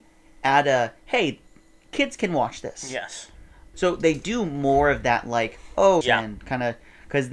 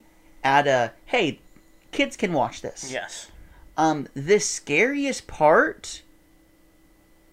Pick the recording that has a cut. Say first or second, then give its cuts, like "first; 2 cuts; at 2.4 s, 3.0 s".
first; 2 cuts; at 3.7 s, 6.0 s